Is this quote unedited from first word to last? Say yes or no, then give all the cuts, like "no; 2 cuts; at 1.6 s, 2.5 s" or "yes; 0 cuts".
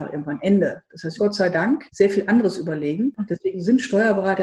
no; 1 cut; at 1.2 s